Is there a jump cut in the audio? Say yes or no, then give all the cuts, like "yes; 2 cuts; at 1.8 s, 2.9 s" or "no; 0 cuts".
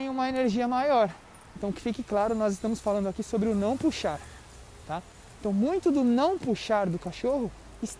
yes; 1 cut; at 1.6 s